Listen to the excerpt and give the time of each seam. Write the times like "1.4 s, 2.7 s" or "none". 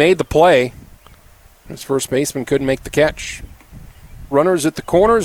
4.3 s